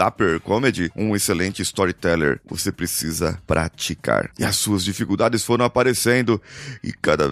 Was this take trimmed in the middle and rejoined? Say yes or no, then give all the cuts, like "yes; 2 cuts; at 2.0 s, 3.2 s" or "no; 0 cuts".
yes; 2 cuts; at 0.9 s, 4.4 s